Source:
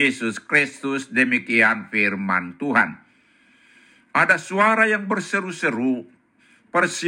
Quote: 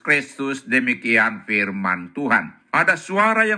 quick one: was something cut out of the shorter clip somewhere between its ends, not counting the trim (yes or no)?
yes